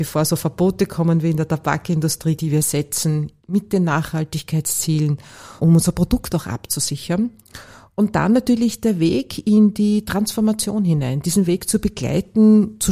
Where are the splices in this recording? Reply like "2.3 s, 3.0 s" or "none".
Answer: 2.4 s, 5.6 s